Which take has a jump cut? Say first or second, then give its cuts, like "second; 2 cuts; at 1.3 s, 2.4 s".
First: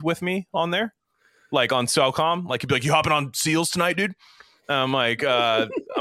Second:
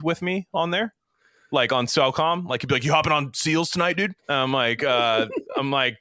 second; 1 cut; at 4.2 s